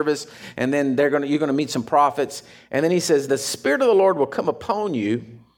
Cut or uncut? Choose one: cut